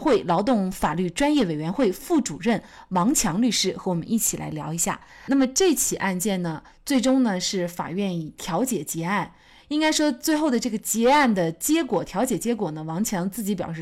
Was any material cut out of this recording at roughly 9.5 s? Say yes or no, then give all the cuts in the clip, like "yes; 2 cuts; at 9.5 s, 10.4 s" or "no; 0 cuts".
no; 1 cut; at 5.1 s